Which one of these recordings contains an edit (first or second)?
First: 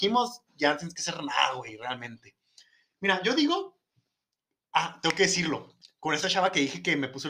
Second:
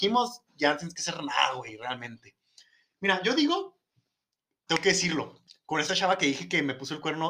second